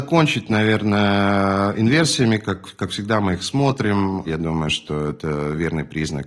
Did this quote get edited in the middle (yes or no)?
yes